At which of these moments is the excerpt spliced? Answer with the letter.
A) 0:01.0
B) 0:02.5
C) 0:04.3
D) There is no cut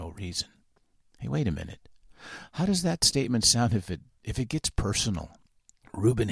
D